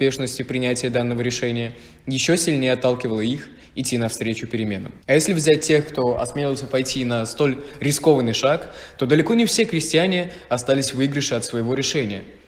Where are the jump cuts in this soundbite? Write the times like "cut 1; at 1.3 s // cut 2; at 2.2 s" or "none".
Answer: cut 1; at 5.0 s